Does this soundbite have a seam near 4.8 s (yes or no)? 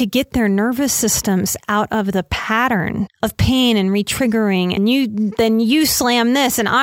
yes